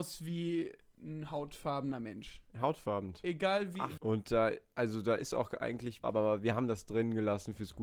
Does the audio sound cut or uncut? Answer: cut